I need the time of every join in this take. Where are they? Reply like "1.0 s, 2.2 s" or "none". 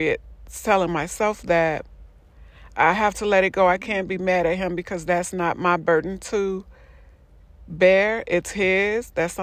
none